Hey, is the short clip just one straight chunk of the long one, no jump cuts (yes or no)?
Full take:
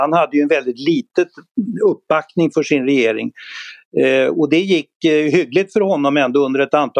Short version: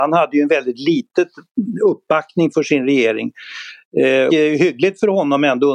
no